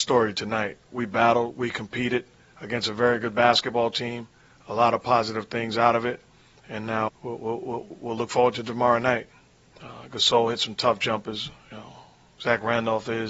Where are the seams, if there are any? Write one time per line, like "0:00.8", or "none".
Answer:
0:07.1
0:09.7